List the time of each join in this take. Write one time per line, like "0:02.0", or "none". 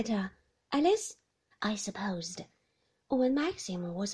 0:01.5